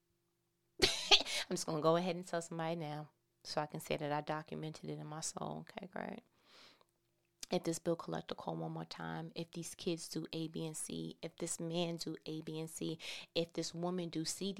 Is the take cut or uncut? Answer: uncut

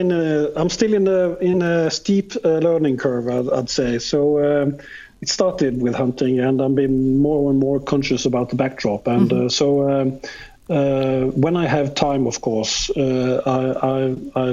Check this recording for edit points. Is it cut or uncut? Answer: uncut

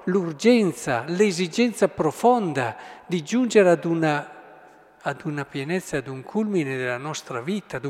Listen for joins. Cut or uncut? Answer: uncut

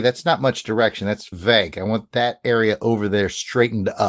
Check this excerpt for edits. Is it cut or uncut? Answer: cut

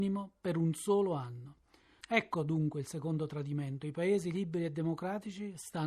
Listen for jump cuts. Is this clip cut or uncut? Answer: cut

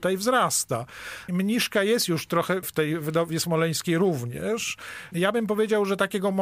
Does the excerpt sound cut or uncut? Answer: uncut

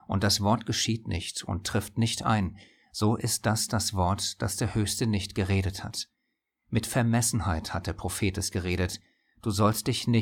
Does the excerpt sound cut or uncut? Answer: uncut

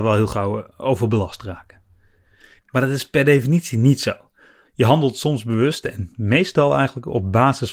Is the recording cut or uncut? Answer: cut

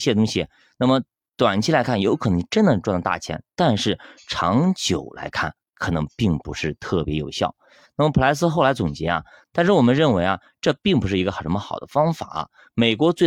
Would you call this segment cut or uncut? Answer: cut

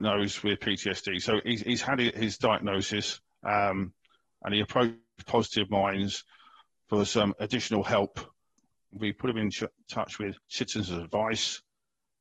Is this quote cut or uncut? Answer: cut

